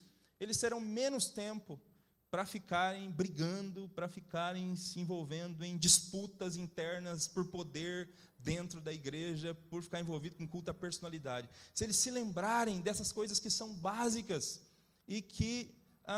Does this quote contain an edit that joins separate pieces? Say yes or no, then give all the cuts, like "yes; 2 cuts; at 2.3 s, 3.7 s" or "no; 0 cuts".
no; 0 cuts